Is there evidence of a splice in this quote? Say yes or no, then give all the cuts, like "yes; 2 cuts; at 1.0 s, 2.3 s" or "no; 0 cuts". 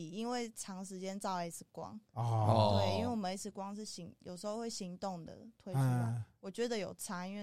no; 0 cuts